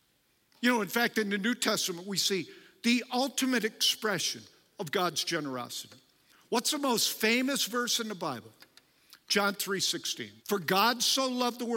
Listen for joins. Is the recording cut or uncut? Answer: cut